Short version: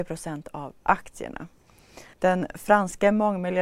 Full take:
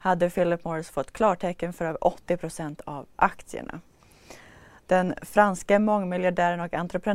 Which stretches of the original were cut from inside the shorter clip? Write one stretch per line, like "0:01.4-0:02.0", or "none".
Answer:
0:04.5-0:04.8